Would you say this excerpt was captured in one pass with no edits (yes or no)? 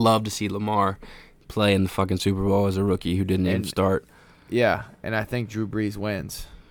yes